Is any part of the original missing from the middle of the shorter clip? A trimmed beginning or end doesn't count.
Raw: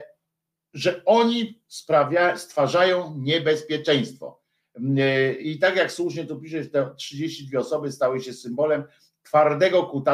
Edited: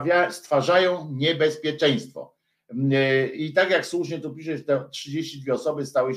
no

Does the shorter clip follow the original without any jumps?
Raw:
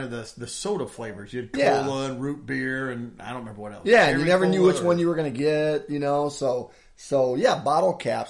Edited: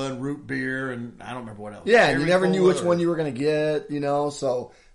yes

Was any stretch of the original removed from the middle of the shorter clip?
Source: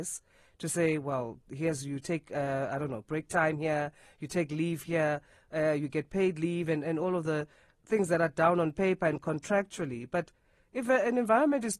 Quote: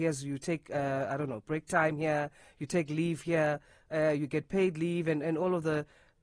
no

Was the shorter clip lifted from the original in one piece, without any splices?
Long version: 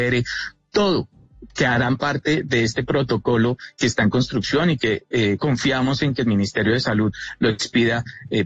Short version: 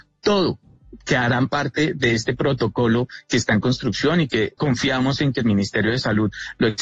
no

